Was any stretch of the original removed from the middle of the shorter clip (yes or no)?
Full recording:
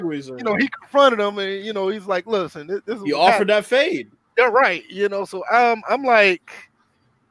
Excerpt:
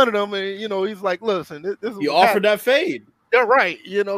no